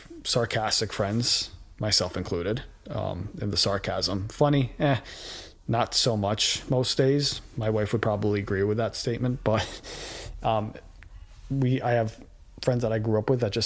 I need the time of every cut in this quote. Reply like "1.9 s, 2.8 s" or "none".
none